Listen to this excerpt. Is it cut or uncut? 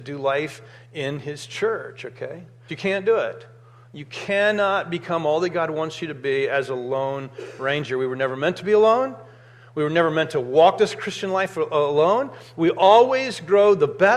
cut